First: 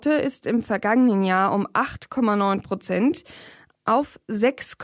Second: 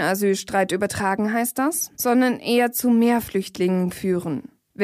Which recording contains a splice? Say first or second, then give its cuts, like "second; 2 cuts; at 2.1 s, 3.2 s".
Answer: second; 1 cut; at 1.9 s